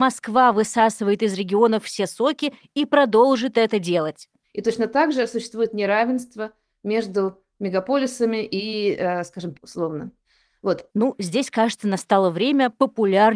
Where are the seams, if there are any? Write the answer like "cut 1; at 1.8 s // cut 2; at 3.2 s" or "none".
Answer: cut 1; at 4.4 s // cut 2; at 9.5 s // cut 3; at 10.9 s